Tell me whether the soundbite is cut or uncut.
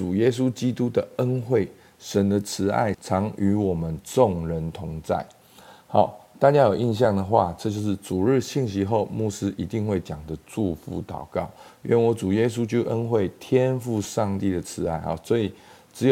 cut